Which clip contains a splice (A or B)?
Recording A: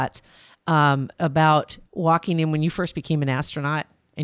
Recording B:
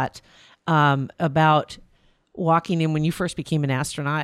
A